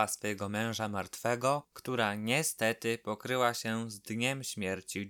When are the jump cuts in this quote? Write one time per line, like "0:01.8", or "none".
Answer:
0:01.7